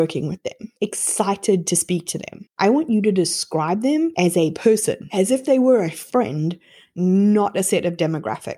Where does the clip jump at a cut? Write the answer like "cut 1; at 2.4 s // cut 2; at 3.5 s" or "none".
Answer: none